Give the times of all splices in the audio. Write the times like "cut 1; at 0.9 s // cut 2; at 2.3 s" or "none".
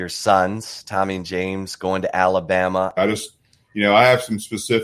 cut 1; at 3.0 s